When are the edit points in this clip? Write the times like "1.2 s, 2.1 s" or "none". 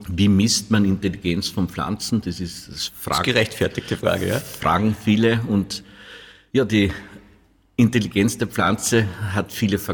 none